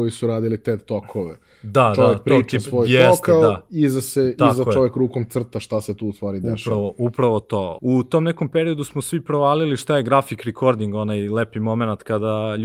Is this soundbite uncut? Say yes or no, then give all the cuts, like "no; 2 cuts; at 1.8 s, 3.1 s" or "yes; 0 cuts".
no; 1 cut; at 7.8 s